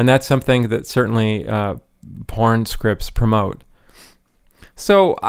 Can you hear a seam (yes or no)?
no